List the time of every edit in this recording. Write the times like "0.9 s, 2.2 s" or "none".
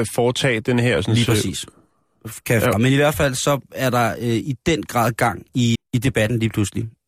2.7 s, 5.7 s